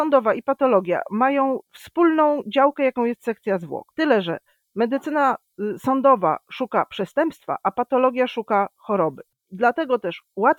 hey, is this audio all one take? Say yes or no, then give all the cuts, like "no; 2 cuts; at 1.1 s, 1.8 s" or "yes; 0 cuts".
yes; 0 cuts